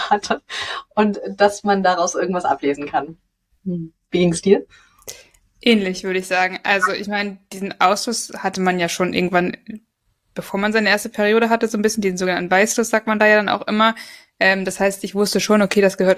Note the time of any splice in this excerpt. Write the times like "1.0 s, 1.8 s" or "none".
none